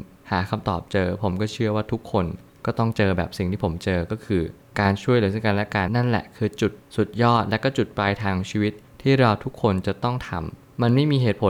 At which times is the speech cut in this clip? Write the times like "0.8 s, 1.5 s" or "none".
5.9 s